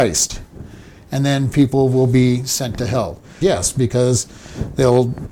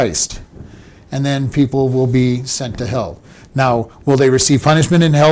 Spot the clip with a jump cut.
first; 1 cut; at 3.4 s

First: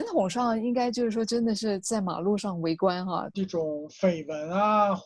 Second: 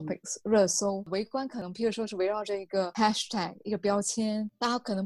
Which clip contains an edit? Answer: first; 1 cut; at 3.3 s

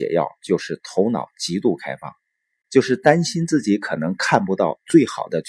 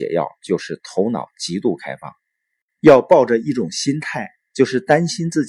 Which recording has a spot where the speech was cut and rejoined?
first; 1 cut; at 2.6 s

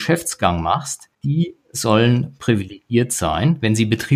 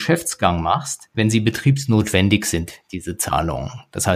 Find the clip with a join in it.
second; 1 cut; at 1.1 s

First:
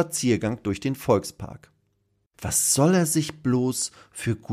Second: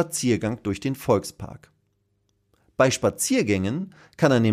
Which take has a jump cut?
first; 1 cut; at 2.3 s

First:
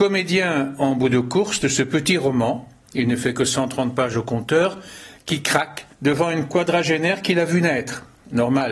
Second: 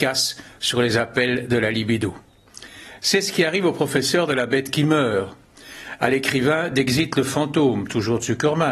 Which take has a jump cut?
first; 1 cut; at 5.9 s

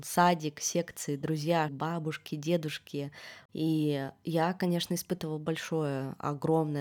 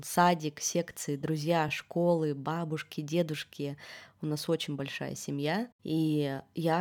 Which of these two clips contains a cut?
first; 2 cuts; at 1.7 s, 3.5 s

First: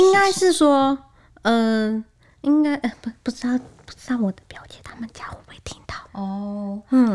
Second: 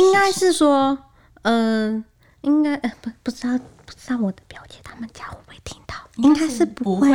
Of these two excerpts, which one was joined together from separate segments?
first; 1 cut; at 6.1 s

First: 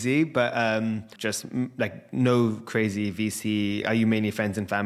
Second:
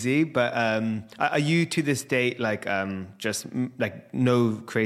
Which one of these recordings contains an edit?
first; 2 cuts; at 1.2 s, 3.8 s

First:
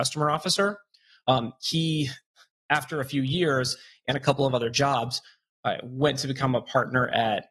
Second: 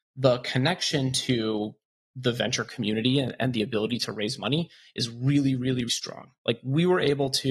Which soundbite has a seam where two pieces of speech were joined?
second; 1 cut; at 5.9 s

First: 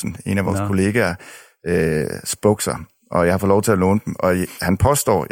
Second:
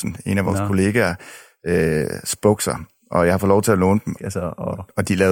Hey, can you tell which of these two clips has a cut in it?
second; 1 cut; at 4.2 s

